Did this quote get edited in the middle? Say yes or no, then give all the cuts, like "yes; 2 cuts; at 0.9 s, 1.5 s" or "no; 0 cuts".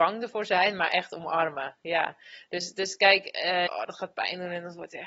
yes; 1 cut; at 3.7 s